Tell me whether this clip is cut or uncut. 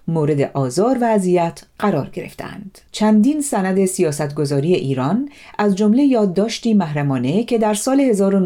cut